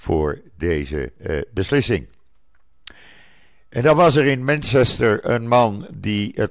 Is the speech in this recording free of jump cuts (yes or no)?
no